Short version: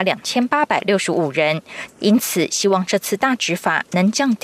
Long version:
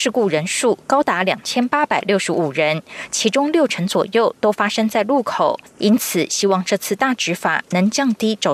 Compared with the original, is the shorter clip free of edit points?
no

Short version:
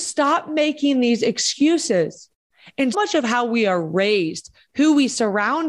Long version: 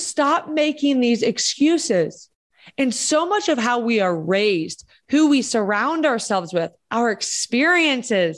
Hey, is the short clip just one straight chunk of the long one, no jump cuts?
no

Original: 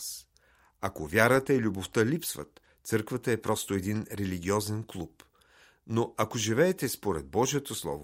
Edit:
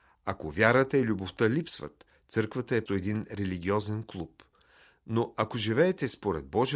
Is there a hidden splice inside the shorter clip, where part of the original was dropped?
yes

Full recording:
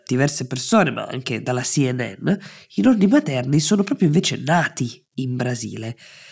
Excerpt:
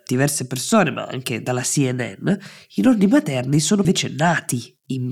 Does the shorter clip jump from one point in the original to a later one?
yes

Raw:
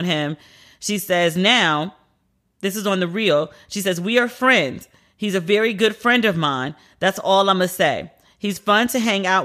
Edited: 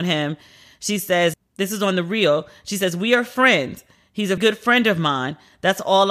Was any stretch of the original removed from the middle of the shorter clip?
yes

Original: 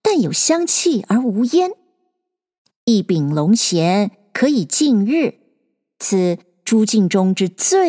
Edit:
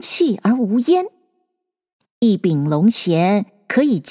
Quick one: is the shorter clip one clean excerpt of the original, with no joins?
yes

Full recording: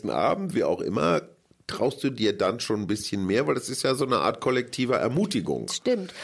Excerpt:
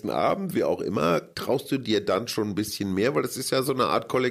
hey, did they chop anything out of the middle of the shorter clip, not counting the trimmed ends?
yes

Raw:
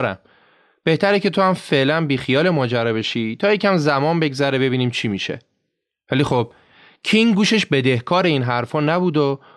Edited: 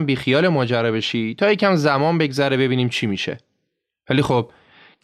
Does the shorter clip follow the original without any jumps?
yes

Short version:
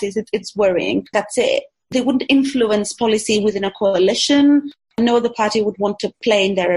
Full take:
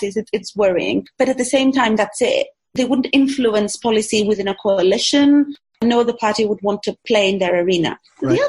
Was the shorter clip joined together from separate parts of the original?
yes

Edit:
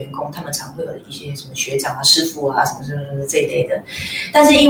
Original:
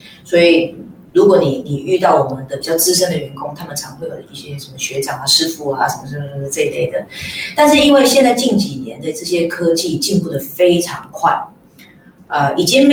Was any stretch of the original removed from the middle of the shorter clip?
no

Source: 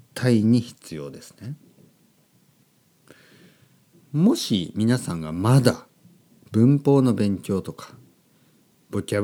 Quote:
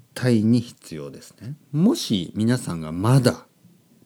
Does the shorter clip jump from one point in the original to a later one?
yes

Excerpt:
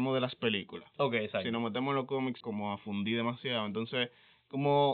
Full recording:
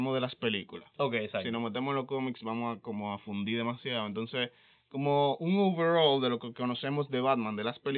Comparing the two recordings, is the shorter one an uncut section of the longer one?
no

